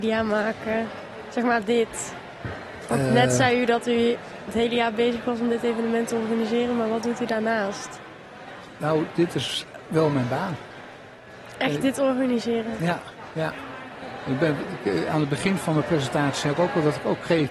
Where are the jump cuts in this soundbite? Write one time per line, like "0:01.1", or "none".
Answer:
none